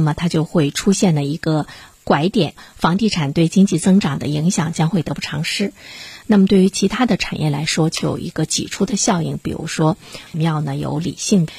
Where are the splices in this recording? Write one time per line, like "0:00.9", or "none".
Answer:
0:06.2
0:10.3